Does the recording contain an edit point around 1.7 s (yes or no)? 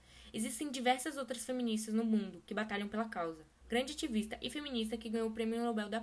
no